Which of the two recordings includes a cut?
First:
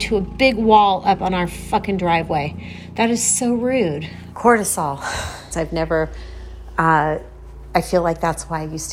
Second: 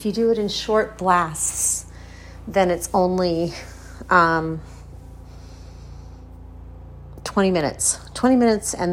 first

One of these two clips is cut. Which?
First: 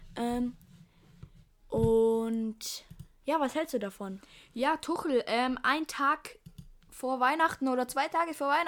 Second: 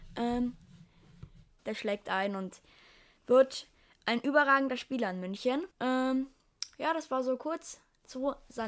second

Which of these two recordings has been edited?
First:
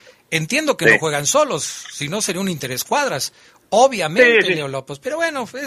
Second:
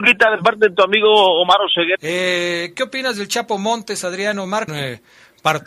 second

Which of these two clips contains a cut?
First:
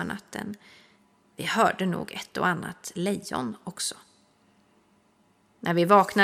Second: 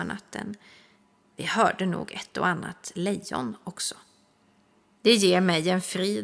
second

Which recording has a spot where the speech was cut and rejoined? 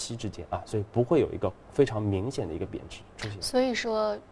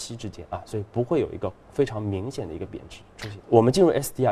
second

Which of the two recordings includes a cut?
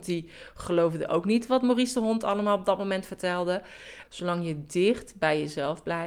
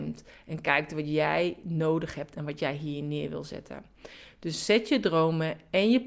first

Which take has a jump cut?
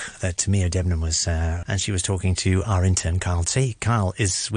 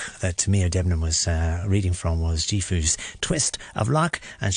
first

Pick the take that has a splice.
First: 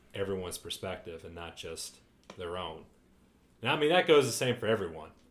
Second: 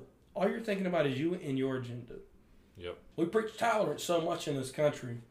second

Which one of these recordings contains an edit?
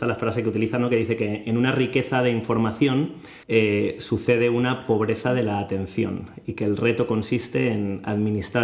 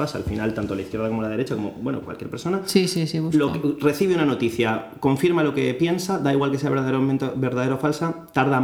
first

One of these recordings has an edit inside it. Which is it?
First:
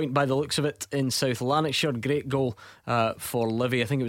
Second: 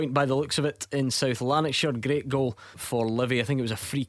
second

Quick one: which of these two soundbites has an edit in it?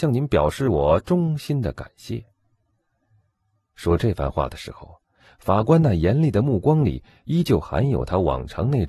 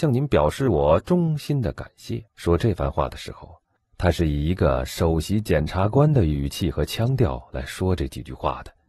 second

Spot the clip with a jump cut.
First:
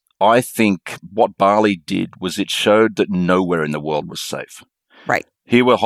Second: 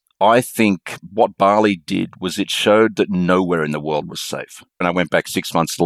second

